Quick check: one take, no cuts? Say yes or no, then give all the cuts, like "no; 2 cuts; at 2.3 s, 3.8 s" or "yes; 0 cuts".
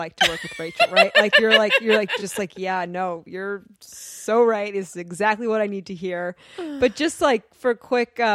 yes; 0 cuts